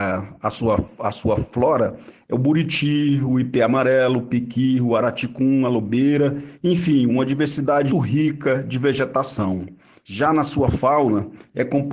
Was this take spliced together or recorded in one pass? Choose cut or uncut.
cut